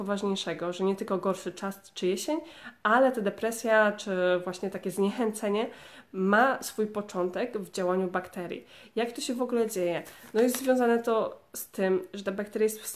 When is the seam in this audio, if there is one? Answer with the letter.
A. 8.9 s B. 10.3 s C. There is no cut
C